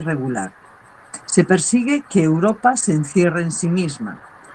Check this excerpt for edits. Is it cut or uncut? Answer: uncut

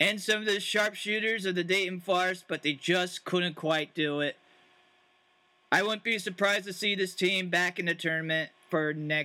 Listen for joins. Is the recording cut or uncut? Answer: uncut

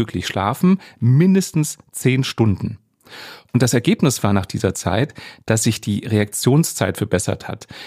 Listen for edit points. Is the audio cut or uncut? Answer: uncut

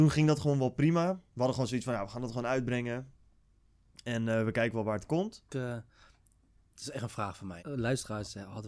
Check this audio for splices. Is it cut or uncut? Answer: cut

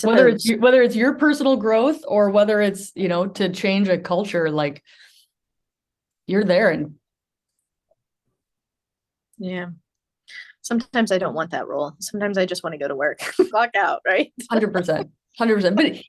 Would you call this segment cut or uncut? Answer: cut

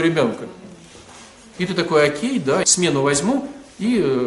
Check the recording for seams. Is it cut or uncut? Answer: cut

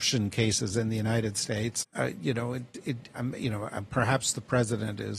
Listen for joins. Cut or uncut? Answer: cut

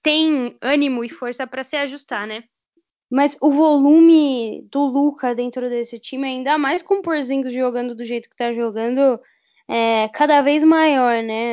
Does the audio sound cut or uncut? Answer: cut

